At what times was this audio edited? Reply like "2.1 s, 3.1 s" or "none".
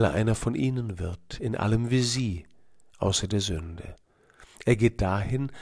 none